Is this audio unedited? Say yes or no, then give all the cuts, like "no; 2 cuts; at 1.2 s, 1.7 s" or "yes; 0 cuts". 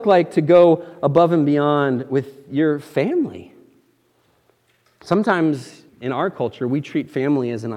no; 1 cut; at 5.9 s